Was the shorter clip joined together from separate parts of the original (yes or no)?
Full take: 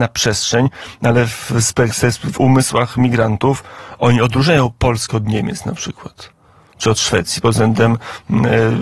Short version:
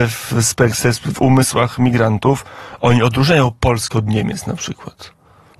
no